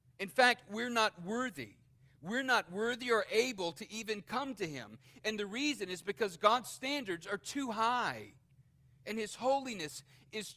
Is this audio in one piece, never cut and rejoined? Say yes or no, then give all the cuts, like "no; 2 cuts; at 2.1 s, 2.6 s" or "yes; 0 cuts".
yes; 0 cuts